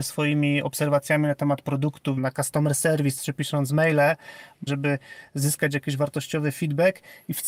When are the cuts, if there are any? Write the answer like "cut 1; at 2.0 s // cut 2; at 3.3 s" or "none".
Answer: cut 1; at 2.2 s // cut 2; at 4.7 s